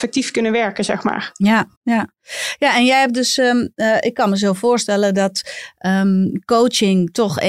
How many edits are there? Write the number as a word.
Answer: one